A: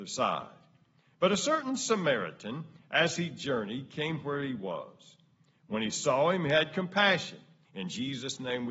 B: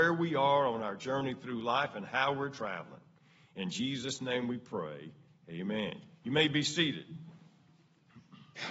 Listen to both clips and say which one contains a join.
A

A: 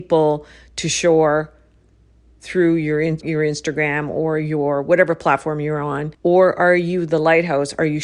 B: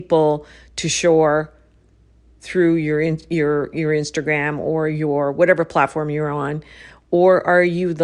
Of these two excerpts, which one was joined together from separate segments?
A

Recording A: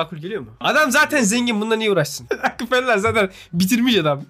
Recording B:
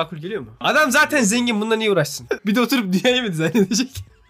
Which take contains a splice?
B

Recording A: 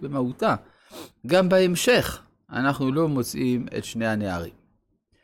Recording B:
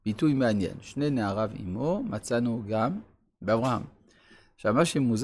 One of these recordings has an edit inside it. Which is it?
A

